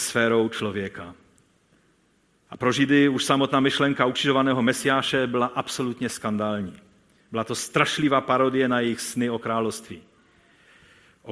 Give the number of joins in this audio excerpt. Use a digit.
1